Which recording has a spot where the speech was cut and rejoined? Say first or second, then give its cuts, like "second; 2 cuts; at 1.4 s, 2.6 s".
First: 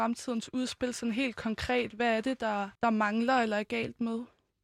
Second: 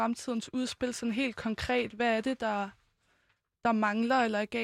first; 1 cut; at 2.8 s